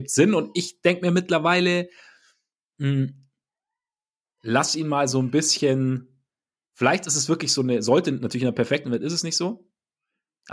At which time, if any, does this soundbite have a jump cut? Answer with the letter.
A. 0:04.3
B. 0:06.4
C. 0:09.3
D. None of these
D